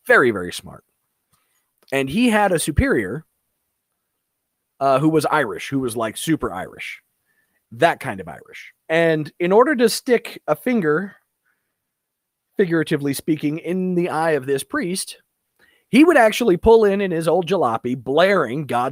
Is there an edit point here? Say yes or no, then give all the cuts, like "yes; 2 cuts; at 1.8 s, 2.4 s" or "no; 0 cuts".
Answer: yes; 2 cuts; at 7.6 s, 8.8 s